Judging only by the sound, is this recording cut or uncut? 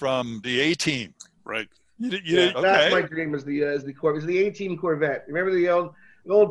cut